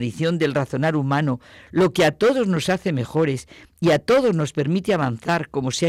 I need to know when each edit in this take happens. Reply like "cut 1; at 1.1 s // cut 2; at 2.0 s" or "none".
none